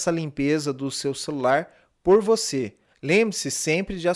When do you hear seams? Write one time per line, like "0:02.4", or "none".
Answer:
0:02.9